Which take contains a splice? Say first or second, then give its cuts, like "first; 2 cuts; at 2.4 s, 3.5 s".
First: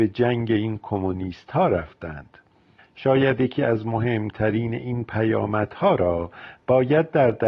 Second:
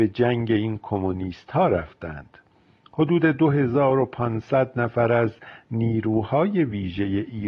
first; 1 cut; at 2.8 s